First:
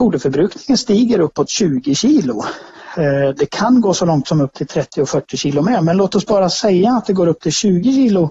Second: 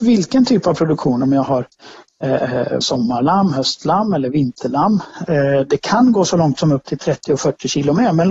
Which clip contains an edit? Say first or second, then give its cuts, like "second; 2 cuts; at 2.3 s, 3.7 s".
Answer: second; 2 cuts; at 2.8 s, 5.3 s